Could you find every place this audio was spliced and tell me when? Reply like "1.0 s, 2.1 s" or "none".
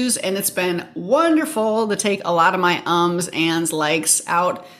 none